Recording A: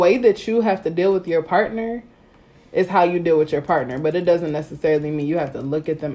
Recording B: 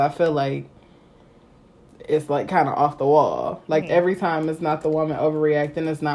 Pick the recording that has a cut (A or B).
B